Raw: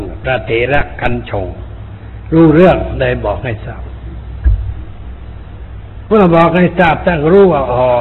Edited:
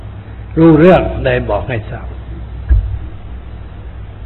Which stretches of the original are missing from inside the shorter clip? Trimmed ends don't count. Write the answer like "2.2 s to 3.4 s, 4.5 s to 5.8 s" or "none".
none